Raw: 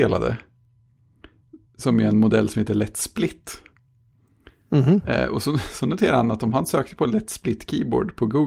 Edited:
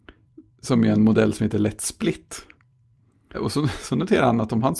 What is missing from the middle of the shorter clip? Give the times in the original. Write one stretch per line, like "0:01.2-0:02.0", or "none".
0:04.5-0:05.2